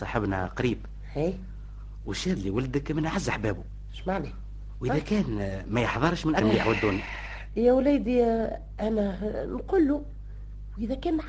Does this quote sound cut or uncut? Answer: cut